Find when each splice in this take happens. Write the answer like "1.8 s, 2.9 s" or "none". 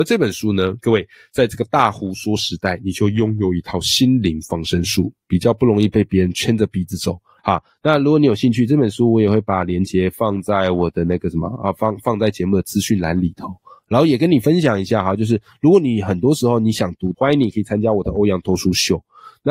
7.4 s, 17.1 s

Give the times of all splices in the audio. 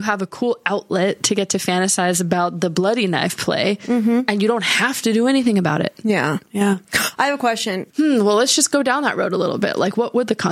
7.9 s

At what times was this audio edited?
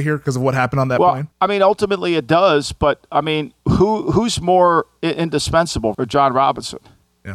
1.3 s, 5.9 s

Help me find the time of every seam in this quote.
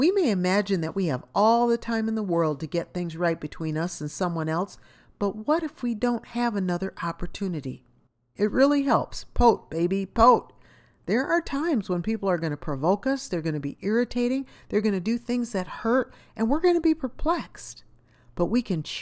8.4 s

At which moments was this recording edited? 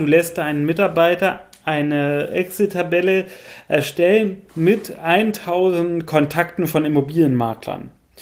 4.5 s

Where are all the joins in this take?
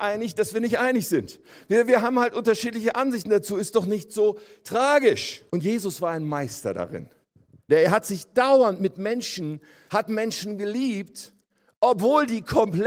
5.5 s, 7.7 s, 9.9 s

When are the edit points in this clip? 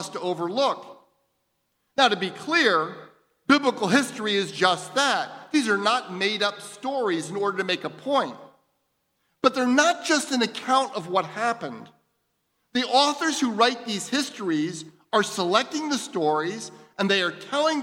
none

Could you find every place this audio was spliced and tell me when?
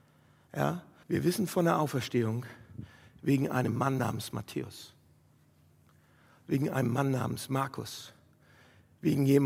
1.0 s

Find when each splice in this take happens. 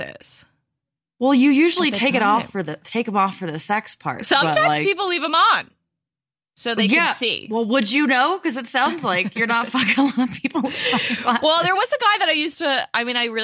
none

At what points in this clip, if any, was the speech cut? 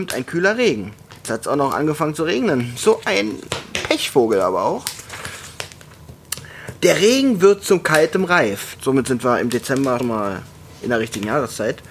8.7 s, 10.0 s

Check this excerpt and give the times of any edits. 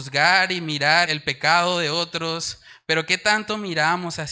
1.1 s

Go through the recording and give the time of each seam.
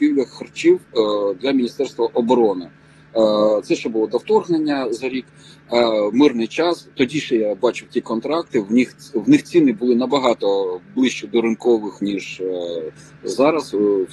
none

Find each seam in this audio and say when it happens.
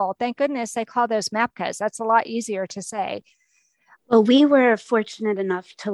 3.9 s

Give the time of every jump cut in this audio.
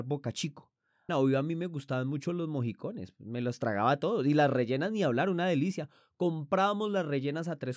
1.1 s

